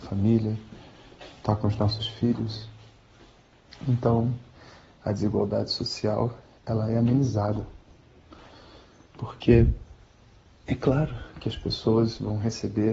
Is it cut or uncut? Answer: uncut